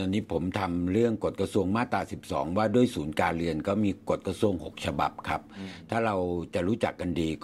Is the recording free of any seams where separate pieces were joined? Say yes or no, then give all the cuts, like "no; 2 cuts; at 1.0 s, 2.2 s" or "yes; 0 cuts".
yes; 0 cuts